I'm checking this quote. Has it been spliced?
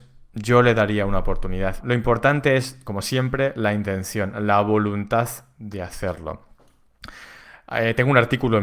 yes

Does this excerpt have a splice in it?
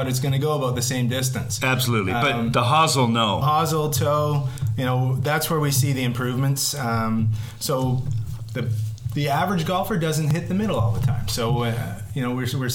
yes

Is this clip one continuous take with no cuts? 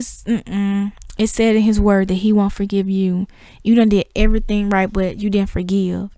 yes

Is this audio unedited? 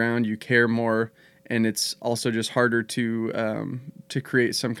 yes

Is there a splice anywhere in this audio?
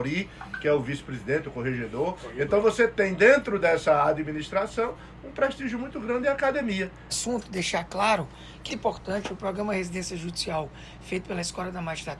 yes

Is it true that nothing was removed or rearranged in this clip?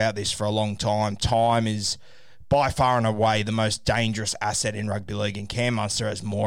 yes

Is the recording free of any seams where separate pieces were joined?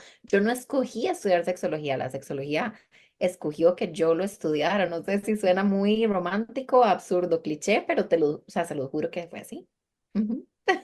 yes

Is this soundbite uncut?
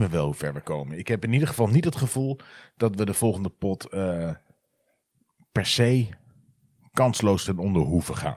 yes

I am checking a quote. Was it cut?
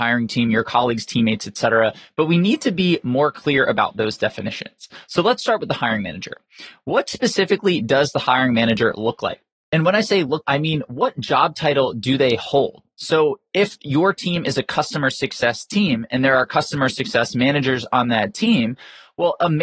yes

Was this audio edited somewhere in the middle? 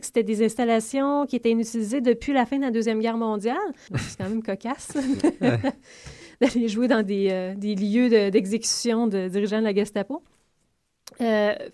yes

